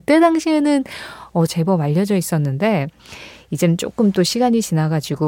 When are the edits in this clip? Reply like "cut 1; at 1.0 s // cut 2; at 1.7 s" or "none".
cut 1; at 1.5 s